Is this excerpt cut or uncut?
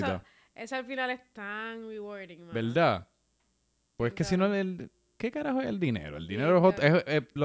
uncut